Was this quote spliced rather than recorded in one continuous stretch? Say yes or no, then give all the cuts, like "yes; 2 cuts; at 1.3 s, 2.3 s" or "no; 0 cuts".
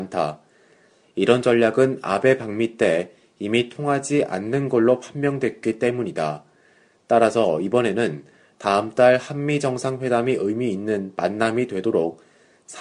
no; 0 cuts